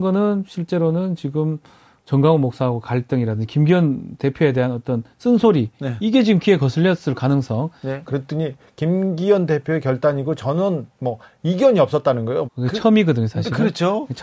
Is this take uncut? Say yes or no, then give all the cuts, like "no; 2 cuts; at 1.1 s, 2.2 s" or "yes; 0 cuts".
no; 2 cuts; at 8.1 s, 12.4 s